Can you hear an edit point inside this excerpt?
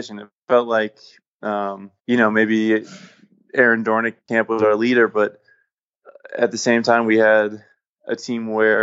yes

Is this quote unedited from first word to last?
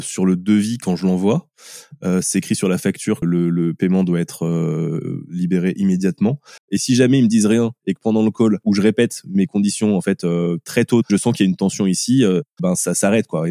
no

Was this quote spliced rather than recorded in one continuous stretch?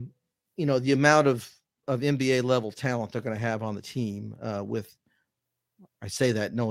no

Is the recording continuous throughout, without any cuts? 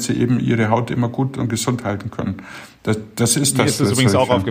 yes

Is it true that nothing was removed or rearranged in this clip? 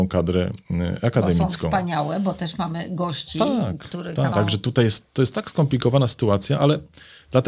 no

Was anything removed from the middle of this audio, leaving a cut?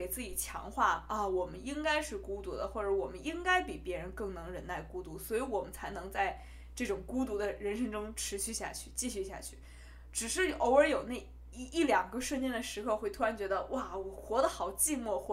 no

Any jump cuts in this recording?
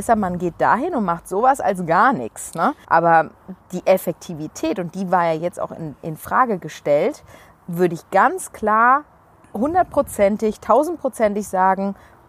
yes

